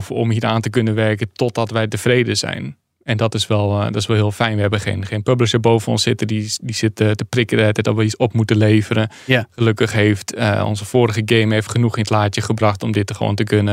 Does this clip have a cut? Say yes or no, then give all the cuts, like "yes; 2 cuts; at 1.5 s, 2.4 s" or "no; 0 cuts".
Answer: no; 0 cuts